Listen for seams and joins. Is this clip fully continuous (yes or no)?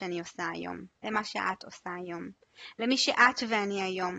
no